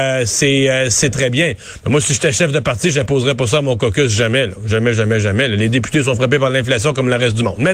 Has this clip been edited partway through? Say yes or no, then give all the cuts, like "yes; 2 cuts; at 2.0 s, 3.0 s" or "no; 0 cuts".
yes; 1 cut; at 1.1 s